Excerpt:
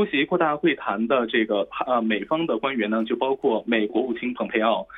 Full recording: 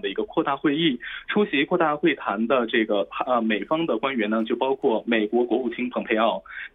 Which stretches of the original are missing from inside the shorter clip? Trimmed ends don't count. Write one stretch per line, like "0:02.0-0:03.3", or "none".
0:05.3-0:05.5